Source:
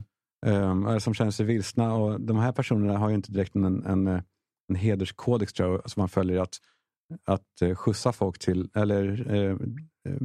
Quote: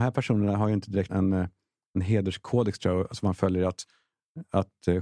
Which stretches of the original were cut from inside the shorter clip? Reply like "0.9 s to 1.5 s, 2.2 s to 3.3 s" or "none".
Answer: 3.5 s to 3.8 s